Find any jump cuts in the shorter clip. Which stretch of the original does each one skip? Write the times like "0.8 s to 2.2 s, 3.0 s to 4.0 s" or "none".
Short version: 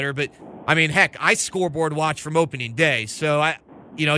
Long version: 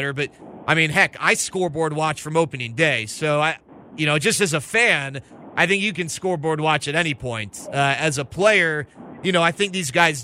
none